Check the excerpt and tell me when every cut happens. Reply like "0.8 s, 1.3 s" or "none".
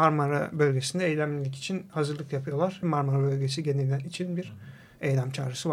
2.8 s